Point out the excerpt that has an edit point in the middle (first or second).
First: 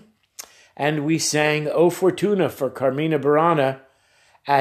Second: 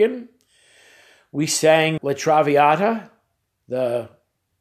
second